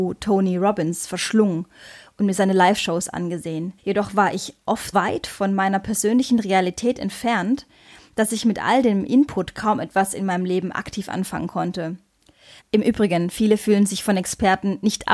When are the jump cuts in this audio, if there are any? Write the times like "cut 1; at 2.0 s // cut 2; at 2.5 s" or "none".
cut 1; at 3.8 s // cut 2; at 4.9 s // cut 3; at 12.6 s